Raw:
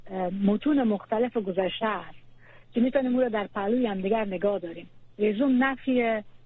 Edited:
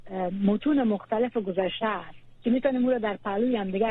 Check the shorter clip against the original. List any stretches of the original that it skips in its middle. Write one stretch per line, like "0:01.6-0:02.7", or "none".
0:02.3-0:02.6